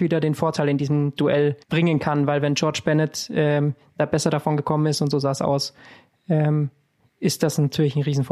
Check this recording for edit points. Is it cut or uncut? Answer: cut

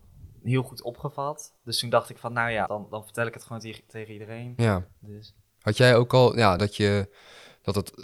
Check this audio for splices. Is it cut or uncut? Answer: cut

